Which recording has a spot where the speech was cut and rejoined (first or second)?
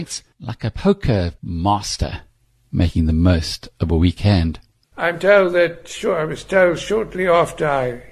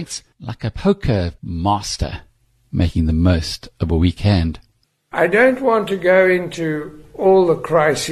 first